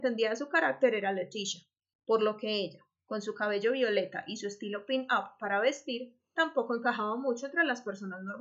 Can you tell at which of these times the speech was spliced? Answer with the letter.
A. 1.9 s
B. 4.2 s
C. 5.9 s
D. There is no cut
A